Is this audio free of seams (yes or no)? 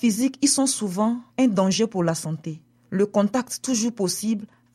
no